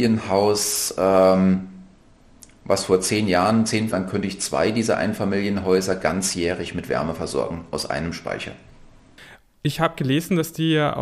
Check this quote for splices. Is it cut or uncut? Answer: cut